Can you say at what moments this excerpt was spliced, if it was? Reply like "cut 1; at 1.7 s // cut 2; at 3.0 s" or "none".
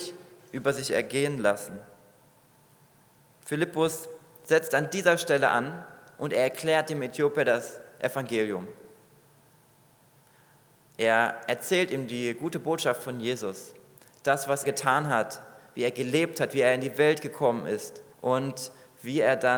cut 1; at 14.6 s // cut 2; at 18.1 s